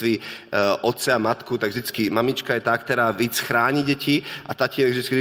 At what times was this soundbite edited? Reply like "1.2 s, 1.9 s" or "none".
none